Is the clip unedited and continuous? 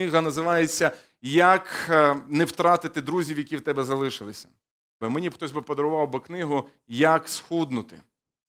no; 1 cut; at 5.0 s

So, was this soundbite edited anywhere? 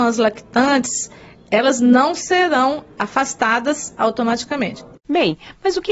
yes; 1 cut; at 5.0 s

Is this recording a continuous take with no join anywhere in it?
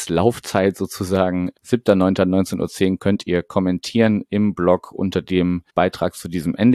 no; 1 cut; at 5.7 s

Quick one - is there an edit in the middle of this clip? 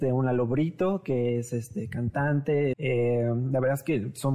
yes; 1 cut; at 2.7 s

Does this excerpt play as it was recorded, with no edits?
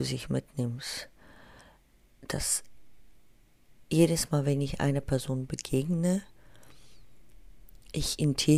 yes; 0 cuts

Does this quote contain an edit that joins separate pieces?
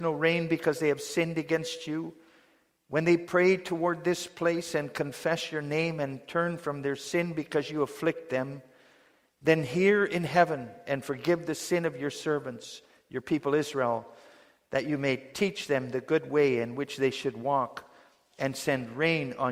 no; 0 cuts

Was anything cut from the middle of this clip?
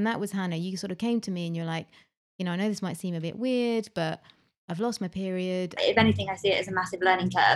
yes; 1 cut; at 5.8 s

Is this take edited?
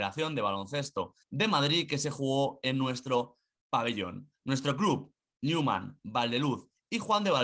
yes; 1 cut; at 1.2 s

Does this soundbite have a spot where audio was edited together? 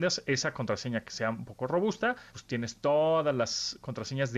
yes; 1 cut; at 2.3 s

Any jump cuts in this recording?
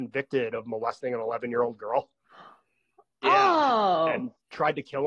no; 0 cuts

